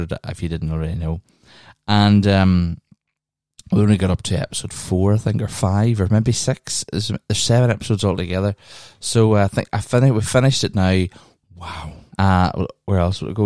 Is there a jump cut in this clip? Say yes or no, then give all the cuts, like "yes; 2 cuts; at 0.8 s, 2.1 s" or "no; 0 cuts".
yes; 1 cut; at 12.1 s